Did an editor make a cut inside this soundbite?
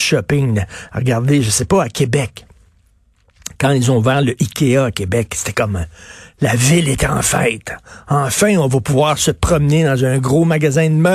no; 0 cuts

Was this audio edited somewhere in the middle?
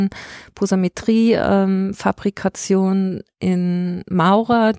no; 0 cuts

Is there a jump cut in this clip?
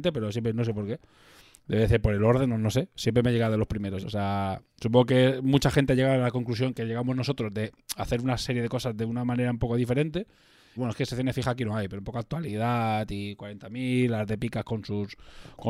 yes; 2 cuts; at 4.0 s, 10.8 s

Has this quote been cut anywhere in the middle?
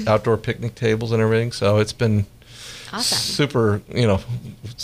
no; 0 cuts

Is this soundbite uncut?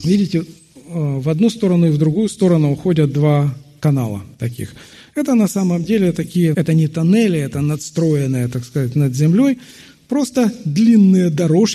no; 1 cut; at 6.5 s

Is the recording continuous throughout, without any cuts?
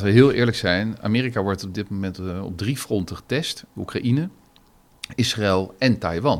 yes; 0 cuts

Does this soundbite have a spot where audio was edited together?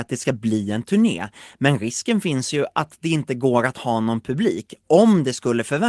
no; 0 cuts

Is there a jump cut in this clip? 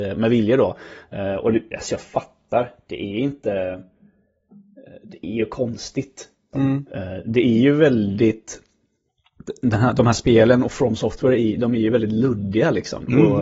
yes; 1 cut; at 6.5 s

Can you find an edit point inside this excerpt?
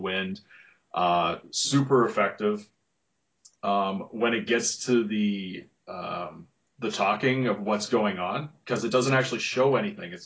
no; 0 cuts

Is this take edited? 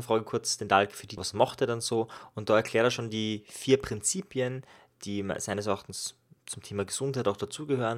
yes; 1 cut; at 1.2 s

